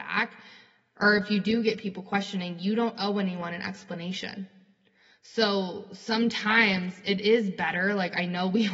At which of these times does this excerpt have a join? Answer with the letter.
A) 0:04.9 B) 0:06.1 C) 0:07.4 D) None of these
D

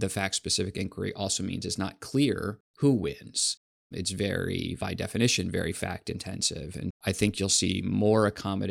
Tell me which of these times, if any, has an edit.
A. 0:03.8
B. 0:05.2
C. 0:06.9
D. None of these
C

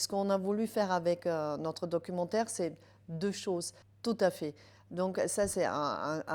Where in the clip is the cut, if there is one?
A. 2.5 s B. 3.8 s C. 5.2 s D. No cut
B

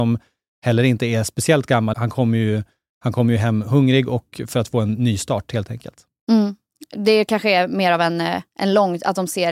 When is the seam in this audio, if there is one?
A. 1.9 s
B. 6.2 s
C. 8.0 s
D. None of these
A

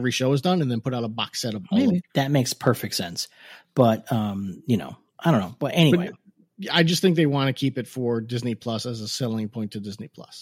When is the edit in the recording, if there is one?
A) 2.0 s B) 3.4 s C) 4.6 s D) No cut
A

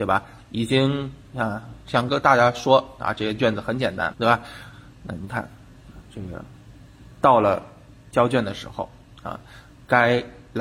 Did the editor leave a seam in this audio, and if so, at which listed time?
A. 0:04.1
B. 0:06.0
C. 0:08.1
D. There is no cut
A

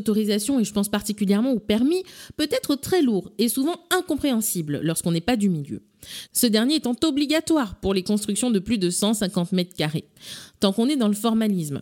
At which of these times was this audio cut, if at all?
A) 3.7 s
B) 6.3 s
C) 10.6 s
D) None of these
B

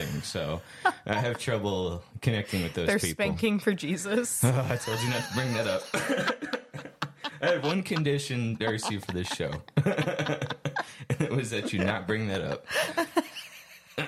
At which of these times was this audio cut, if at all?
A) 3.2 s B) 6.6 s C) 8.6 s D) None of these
D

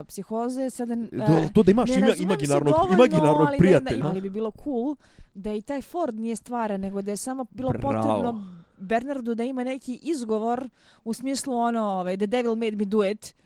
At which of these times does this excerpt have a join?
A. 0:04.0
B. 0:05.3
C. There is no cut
A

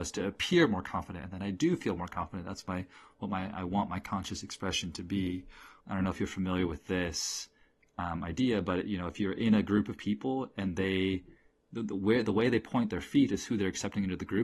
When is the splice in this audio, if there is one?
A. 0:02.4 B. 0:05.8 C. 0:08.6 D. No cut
B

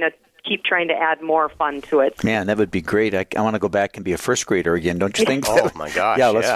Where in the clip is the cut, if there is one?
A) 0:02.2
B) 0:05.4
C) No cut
A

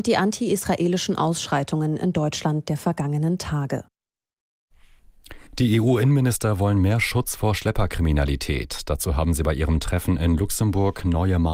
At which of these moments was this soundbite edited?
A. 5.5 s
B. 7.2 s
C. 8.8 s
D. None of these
A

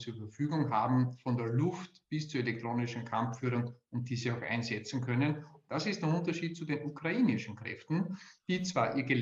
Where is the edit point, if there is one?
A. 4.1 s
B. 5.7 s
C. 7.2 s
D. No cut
B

